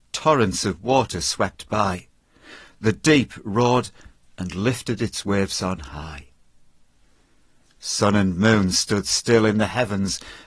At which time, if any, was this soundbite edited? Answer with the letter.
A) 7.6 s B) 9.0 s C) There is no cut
C